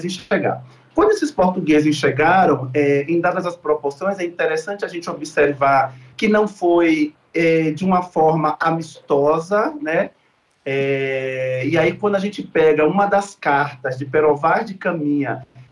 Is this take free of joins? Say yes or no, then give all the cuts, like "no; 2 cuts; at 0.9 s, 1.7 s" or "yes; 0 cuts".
yes; 0 cuts